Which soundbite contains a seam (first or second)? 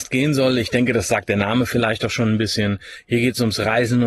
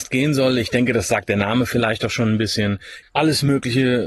second